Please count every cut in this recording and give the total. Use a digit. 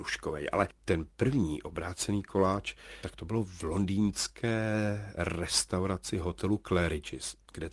1